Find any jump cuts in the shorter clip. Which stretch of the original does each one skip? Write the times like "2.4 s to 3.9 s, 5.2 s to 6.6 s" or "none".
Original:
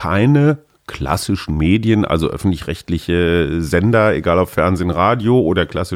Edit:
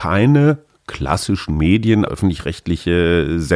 2.1 s to 2.3 s